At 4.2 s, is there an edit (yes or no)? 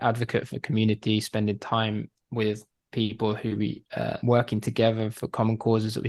yes